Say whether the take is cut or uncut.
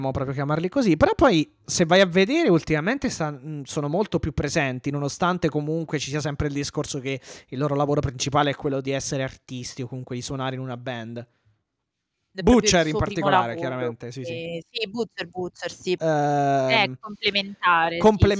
cut